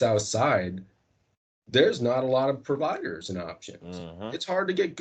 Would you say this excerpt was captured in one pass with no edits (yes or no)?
yes